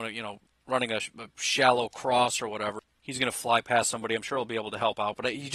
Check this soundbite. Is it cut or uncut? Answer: uncut